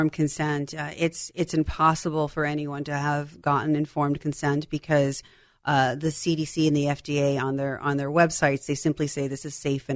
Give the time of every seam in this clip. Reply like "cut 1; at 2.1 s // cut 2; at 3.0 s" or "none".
none